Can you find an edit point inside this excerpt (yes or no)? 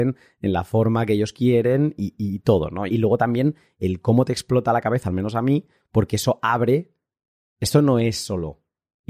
yes